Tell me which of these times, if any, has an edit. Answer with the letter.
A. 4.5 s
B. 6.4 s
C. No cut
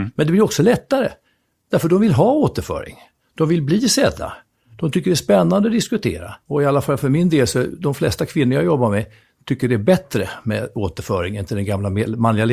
B